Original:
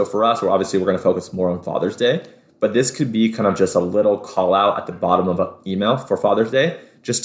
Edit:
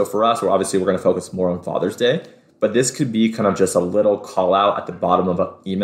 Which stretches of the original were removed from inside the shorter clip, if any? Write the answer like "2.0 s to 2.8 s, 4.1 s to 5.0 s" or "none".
none